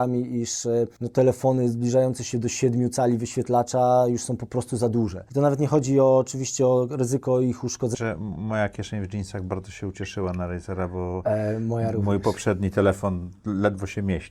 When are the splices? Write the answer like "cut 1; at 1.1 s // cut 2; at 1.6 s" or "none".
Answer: cut 1; at 7.9 s